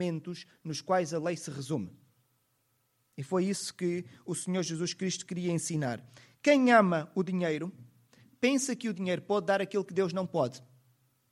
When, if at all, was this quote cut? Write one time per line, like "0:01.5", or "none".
none

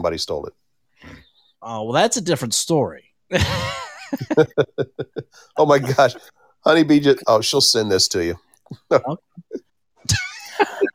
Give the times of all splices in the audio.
0:09.7

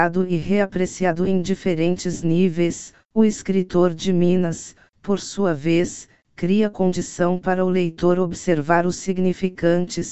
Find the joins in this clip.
none

